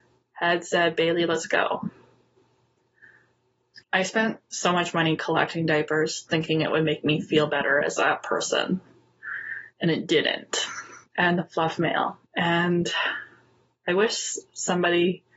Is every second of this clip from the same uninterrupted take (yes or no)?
no